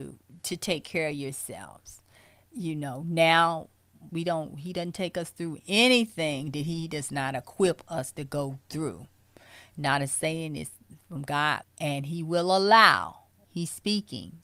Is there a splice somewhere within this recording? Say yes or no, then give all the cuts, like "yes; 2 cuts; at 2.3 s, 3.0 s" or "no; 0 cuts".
yes; 3 cuts; at 4.1 s, 11.6 s, 13.4 s